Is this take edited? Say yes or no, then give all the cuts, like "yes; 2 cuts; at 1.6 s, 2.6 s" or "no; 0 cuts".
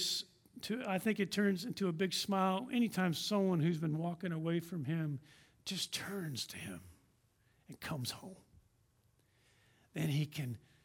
no; 0 cuts